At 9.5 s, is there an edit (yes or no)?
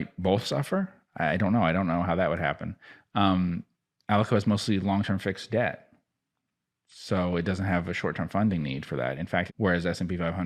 yes